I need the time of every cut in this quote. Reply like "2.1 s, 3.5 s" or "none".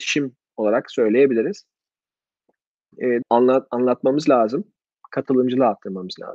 3.2 s, 5.0 s